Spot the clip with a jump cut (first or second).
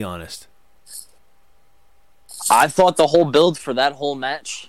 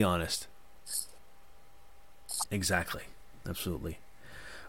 second